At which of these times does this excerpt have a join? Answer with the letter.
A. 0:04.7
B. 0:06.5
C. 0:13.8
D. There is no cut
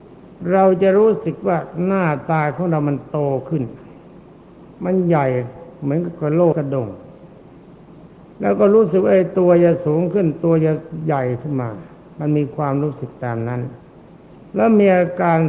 B